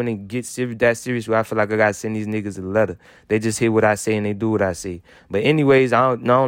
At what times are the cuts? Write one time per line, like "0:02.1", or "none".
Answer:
none